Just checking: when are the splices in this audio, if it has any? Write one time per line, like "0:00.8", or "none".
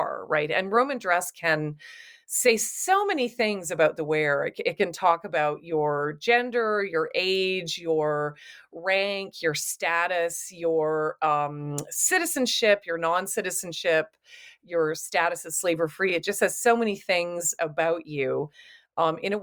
none